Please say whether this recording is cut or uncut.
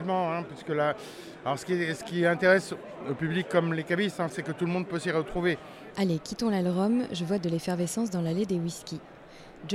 cut